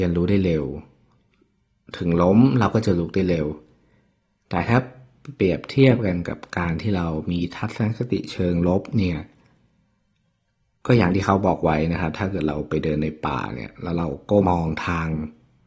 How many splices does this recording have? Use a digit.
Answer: 1